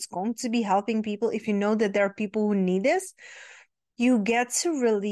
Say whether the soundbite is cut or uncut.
uncut